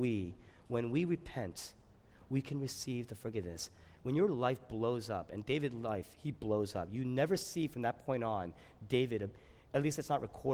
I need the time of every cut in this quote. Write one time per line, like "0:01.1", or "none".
none